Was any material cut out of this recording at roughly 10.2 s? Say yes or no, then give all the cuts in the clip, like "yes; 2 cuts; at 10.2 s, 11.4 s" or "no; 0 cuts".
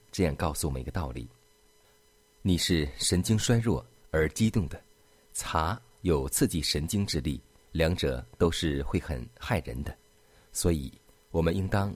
no; 1 cut; at 7.6 s